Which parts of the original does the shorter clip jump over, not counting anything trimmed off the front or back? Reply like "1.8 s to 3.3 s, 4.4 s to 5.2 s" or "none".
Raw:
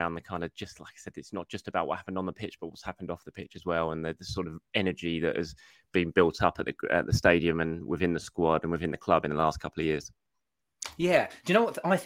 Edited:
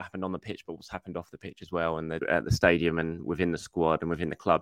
4.1 s to 6.8 s